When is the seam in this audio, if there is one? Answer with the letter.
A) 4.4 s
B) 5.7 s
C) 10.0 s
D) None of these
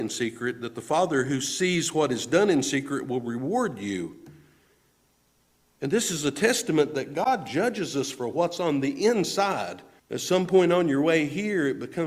C